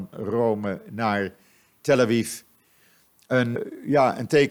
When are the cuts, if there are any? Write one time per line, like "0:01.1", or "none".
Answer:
0:03.5